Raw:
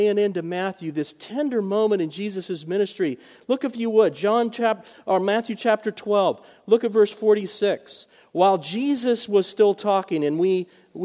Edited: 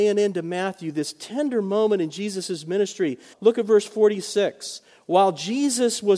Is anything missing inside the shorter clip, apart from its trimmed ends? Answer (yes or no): yes